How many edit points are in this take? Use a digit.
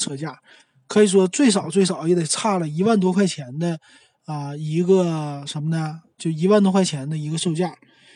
0